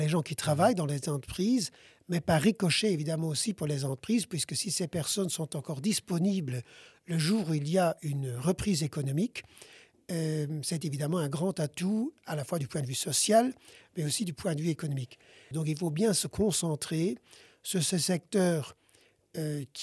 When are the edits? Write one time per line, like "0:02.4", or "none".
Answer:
0:15.5